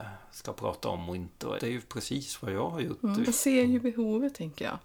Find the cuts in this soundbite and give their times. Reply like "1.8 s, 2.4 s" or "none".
1.6 s, 3.2 s